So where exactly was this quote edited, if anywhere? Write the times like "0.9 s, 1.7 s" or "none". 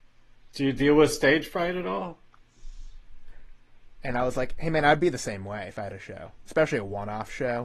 4.0 s